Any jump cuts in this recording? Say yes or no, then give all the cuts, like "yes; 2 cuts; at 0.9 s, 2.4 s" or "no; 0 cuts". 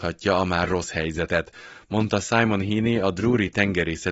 no; 0 cuts